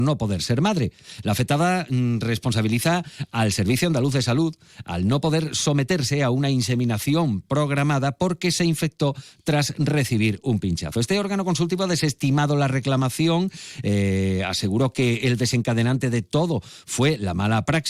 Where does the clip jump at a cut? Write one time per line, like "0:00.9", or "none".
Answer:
none